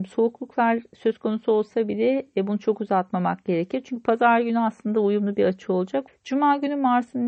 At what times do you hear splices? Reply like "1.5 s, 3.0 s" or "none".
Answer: 6.1 s